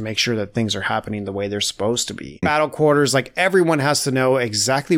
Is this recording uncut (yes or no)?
no